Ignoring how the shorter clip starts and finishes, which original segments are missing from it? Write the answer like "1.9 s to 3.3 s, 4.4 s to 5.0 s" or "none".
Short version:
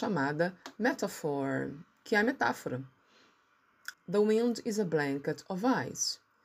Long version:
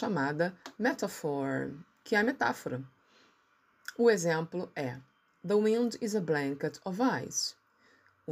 3.9 s to 5.3 s